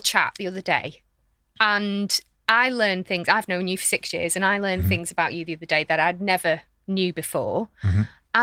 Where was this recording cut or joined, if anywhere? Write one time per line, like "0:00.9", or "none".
none